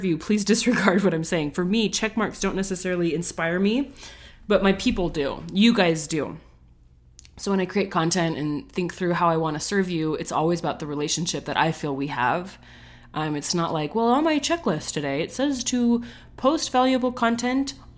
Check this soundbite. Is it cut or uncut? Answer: uncut